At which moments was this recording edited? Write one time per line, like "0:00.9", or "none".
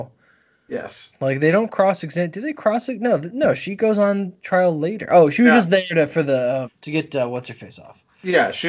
0:01.1
0:06.7